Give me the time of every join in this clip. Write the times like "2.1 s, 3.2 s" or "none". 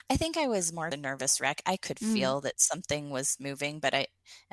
0.9 s